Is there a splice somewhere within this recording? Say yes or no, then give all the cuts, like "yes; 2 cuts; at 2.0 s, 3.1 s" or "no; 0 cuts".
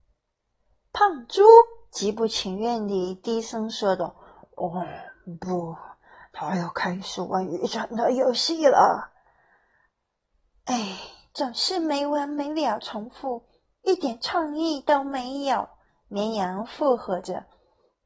no; 0 cuts